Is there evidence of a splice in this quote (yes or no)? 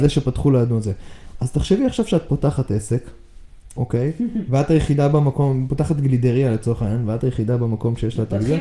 no